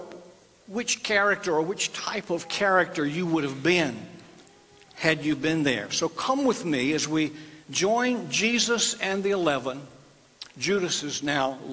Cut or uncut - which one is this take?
uncut